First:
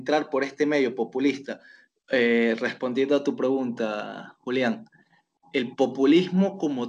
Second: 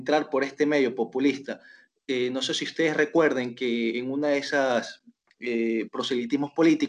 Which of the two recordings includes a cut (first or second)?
first